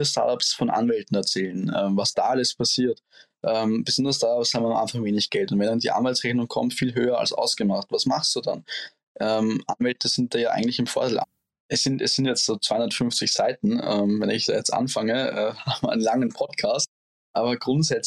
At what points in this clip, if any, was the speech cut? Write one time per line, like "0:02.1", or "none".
0:11.2